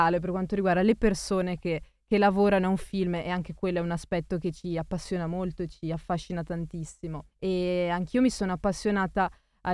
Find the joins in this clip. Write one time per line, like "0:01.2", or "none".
0:07.3